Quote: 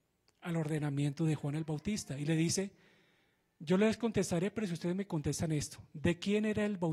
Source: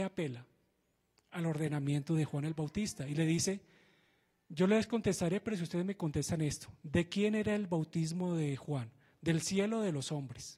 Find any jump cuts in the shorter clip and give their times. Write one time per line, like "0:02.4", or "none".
none

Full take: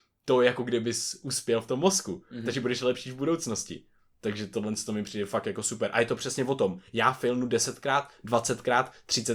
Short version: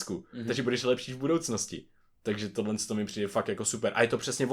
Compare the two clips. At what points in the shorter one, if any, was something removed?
none

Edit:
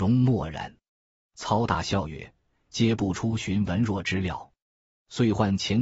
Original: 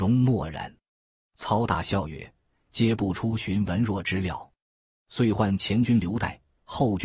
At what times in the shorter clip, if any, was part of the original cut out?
none

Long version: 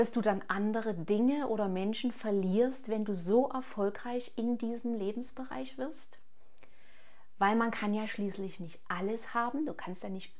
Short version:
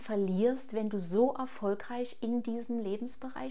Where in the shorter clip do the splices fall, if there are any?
none

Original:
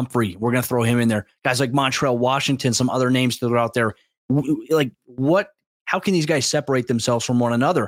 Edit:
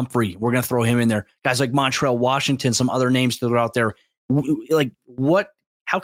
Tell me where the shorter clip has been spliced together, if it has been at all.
none

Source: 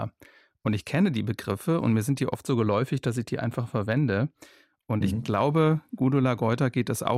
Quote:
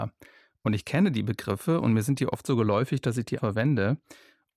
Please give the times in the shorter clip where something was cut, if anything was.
0:03.4

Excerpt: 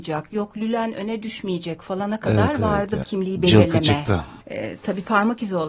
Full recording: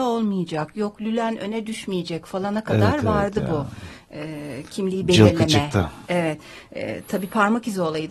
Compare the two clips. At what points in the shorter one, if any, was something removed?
0:03.0
0:04.4

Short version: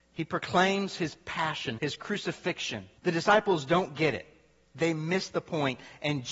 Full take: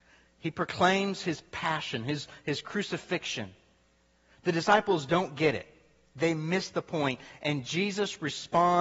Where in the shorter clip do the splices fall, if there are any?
0:01.8
0:03.0

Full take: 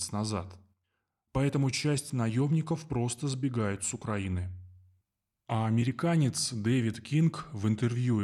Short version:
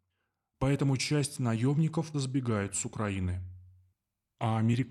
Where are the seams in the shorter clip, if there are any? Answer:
0:02.1

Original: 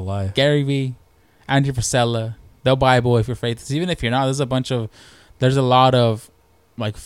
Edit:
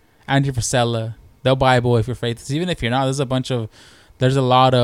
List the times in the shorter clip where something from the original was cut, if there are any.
none

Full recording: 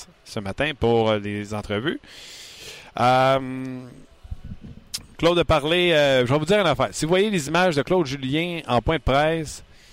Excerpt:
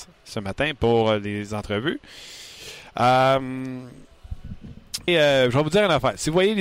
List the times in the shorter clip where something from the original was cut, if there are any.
0:05.1

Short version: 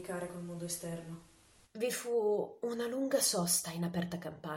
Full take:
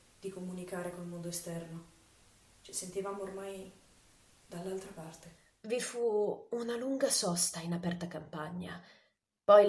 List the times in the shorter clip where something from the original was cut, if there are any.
0:01.6

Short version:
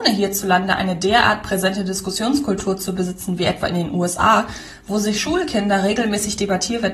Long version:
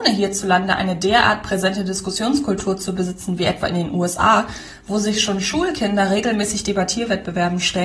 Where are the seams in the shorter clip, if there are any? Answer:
0:05.1

